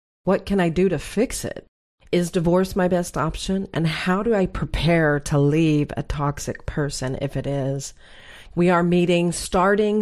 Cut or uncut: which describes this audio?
cut